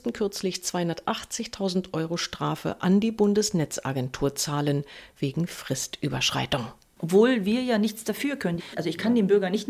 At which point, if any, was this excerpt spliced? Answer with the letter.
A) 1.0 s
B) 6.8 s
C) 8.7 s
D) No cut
D